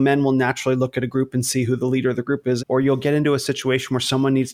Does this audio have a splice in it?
yes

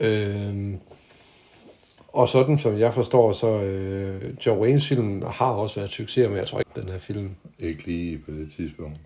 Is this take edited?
yes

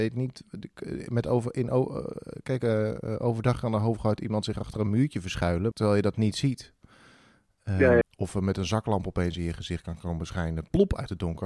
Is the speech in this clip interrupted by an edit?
yes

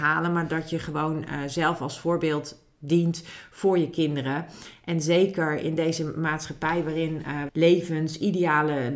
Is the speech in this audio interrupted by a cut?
yes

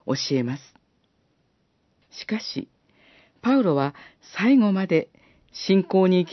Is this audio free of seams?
no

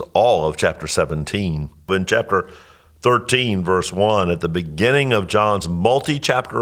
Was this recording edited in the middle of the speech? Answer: yes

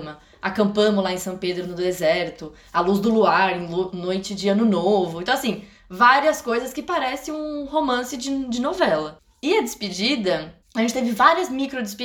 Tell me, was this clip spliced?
yes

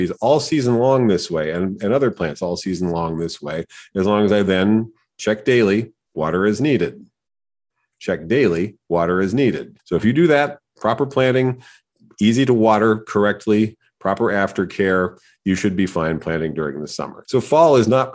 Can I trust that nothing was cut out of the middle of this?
no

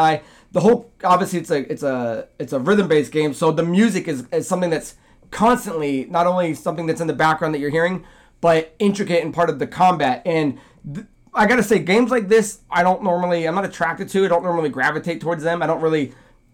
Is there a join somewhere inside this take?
no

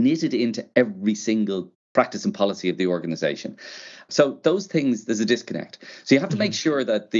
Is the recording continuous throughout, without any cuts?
no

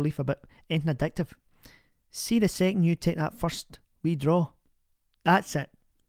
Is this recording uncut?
yes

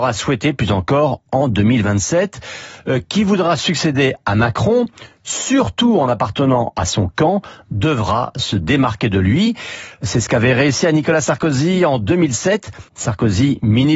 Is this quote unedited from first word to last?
no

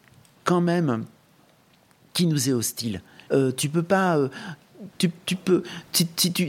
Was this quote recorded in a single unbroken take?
no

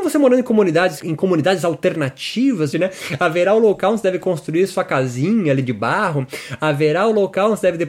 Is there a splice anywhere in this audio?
yes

